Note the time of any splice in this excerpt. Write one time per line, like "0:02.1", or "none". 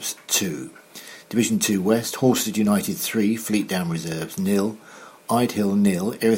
none